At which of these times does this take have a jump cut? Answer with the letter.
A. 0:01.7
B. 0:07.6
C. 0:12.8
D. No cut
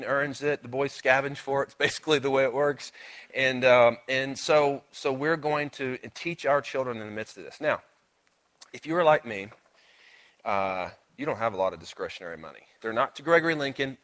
C